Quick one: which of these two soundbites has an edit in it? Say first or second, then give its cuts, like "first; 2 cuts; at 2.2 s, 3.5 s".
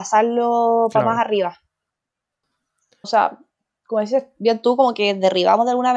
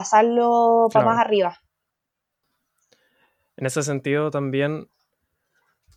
first; 1 cut; at 3.0 s